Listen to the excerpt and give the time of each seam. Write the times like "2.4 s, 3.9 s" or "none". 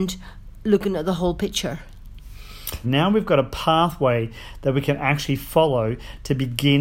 2.8 s